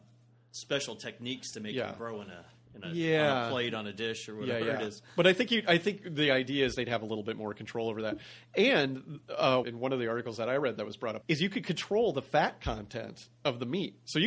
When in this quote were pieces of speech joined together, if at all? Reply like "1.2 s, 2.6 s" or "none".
9.6 s, 11.2 s